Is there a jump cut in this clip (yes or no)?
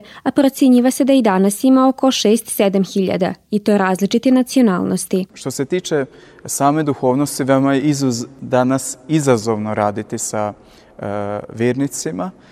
no